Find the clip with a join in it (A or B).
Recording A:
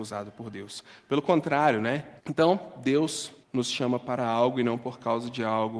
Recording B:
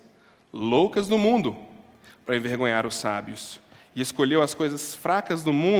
A